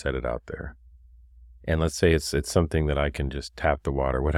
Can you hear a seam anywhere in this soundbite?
no; 0 cuts

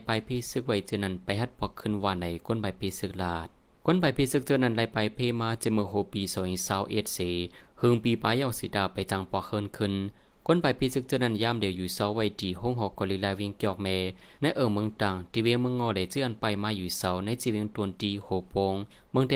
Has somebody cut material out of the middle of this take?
no; 0 cuts

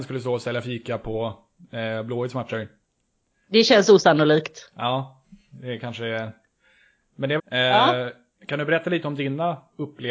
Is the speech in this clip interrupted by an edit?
yes; 1 cut; at 7.4 s

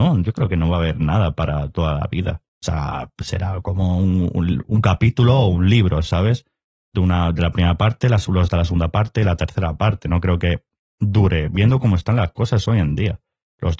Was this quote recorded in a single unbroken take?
no; 1 cut; at 2.5 s

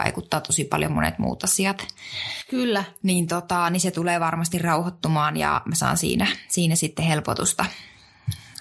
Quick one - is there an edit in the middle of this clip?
no; 0 cuts

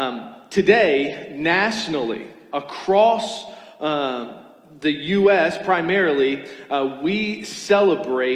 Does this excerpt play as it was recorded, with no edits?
yes; 0 cuts

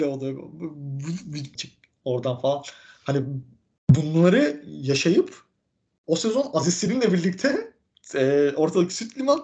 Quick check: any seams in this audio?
yes; 1 cut; at 1.6 s

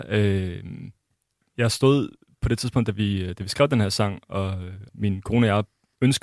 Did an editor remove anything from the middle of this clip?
yes; 2 cuts; at 1.4 s, 4.9 s

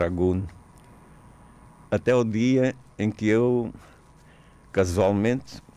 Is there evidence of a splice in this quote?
yes; 1 cut; at 1.9 s

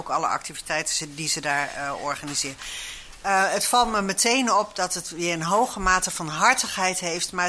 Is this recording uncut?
yes; 0 cuts

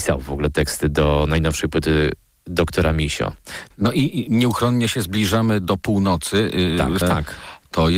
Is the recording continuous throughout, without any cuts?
no; 2 cuts; at 3.7 s, 7.0 s

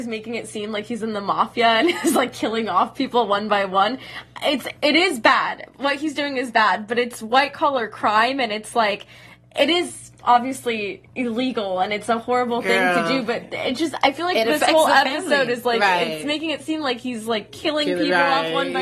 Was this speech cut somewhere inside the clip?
no; 0 cuts

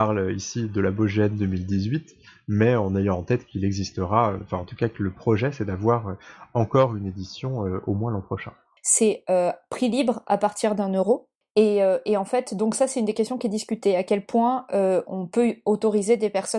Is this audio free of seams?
no; 1 cut; at 8.8 s

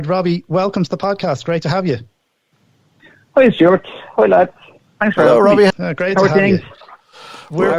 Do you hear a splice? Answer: yes; 1 cut; at 5.7 s

